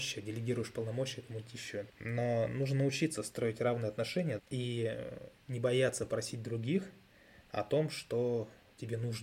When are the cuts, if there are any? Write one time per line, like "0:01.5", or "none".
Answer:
0:01.9
0:04.4